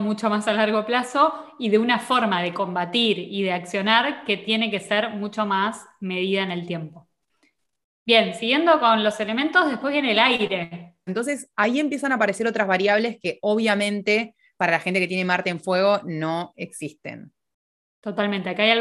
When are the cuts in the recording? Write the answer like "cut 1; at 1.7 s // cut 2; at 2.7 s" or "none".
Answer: cut 1; at 11.1 s

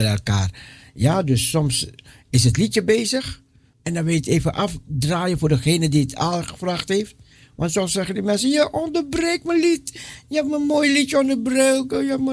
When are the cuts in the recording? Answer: cut 1; at 3.7 s

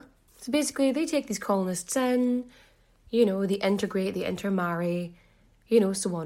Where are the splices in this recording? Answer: none

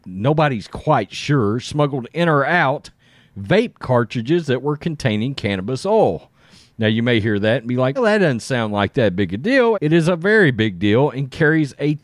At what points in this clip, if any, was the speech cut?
cut 1; at 8.0 s // cut 2; at 9.7 s

